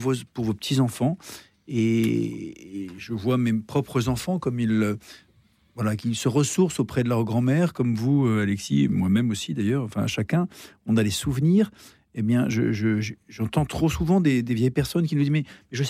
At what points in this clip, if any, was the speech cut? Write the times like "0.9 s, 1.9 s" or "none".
none